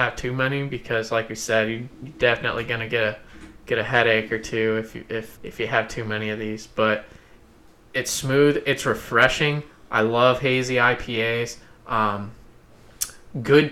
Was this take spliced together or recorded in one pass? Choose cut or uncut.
cut